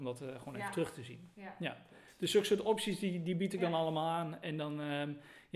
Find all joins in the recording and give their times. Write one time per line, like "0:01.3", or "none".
none